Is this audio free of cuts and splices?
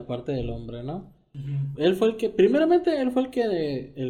no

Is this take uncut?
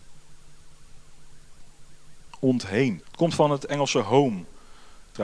no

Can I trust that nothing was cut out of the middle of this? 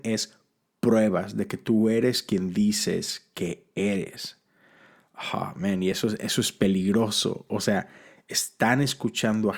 yes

